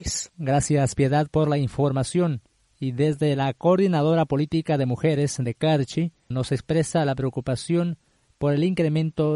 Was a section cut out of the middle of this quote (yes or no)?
yes